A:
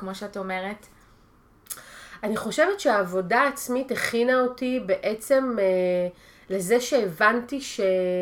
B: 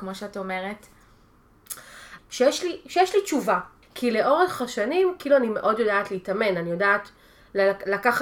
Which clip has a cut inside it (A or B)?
B